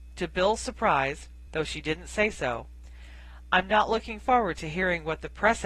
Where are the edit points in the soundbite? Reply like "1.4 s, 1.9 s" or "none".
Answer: 1.5 s